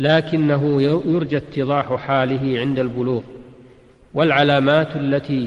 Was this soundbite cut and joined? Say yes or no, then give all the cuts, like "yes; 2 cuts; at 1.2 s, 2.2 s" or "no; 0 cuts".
no; 0 cuts